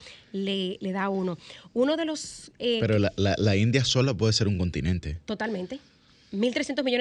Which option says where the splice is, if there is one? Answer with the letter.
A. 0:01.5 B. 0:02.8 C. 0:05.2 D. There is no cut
D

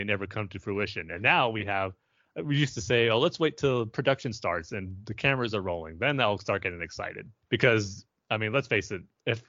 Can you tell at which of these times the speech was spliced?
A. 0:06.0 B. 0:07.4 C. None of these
B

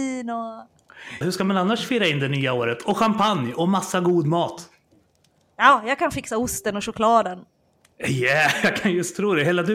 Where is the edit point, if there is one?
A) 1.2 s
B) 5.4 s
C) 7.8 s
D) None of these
A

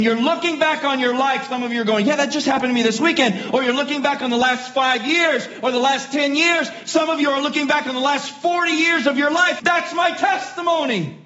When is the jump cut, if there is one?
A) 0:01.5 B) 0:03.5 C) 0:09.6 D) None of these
C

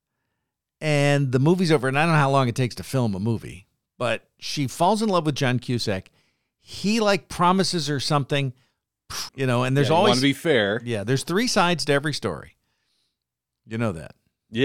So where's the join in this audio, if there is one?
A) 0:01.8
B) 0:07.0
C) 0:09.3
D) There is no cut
C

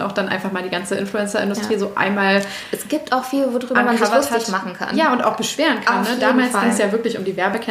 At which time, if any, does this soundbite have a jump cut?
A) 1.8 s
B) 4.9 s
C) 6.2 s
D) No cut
D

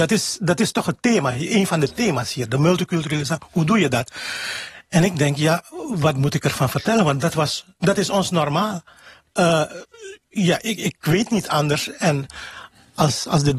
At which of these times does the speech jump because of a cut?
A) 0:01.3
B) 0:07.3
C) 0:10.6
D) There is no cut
D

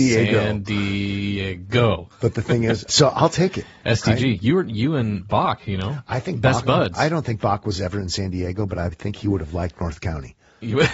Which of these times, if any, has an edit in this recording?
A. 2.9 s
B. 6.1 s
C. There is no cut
A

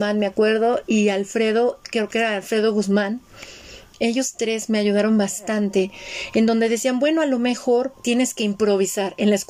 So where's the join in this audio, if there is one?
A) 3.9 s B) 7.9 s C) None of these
B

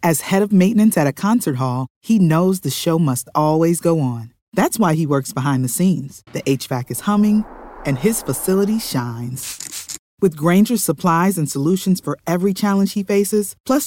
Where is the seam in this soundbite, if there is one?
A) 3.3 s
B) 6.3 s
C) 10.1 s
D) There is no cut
B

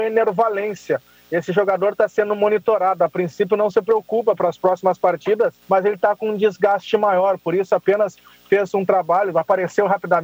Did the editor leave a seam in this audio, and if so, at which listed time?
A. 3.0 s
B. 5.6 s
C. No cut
B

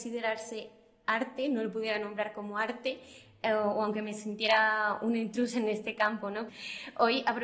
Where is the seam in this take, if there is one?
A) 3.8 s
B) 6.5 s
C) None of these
B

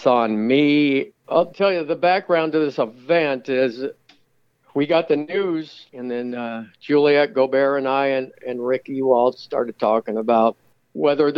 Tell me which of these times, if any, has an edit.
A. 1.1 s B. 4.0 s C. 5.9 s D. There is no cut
A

